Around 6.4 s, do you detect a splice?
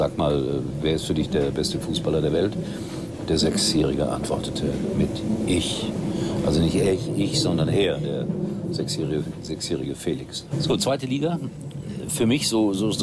no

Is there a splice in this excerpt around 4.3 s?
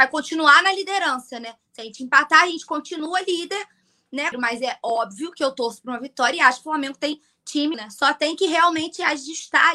yes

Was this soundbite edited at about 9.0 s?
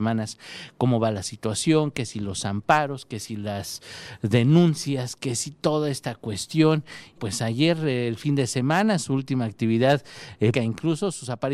no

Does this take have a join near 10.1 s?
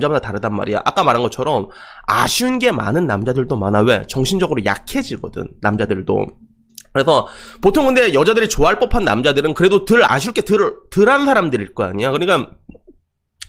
yes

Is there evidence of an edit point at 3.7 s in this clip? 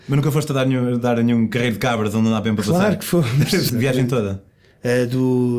yes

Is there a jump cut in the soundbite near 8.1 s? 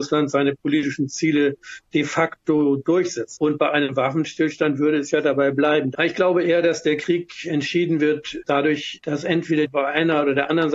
no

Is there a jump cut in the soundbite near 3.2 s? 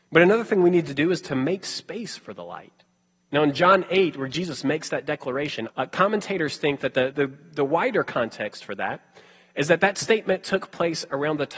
no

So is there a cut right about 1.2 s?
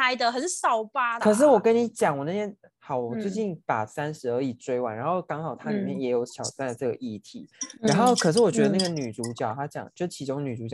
yes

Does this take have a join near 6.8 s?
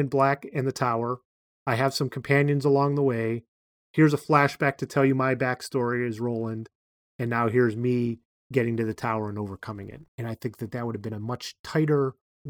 no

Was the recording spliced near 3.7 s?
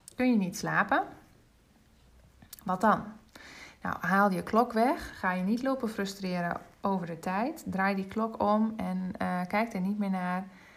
no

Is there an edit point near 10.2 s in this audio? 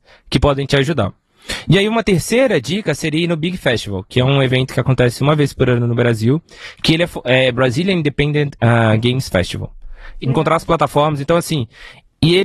yes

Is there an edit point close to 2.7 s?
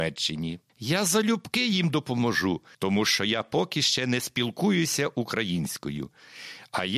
yes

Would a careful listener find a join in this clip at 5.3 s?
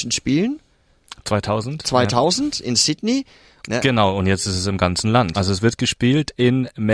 yes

